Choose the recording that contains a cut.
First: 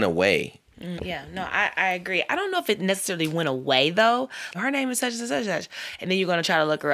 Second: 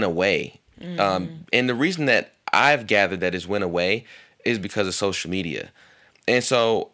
first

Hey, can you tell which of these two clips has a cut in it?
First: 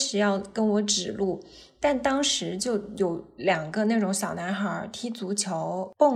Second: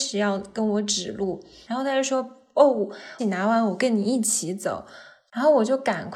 second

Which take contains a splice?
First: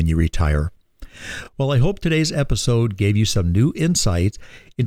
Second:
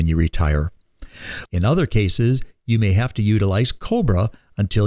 second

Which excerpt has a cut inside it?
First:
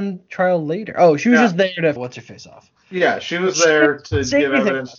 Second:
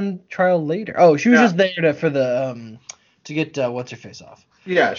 first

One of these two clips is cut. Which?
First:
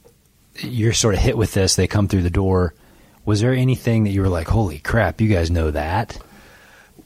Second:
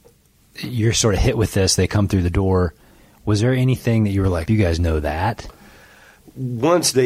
second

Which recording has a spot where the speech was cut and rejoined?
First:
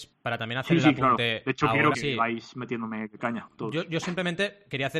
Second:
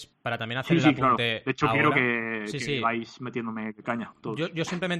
first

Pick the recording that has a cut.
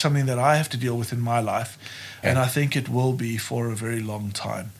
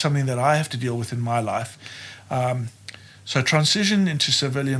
first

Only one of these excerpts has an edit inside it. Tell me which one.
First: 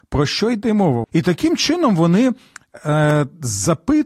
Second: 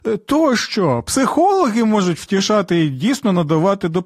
first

